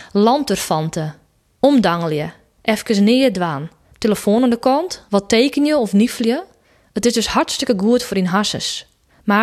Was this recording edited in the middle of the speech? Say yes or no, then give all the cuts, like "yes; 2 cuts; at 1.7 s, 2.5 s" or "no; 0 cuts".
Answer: yes; 1 cut; at 5.1 s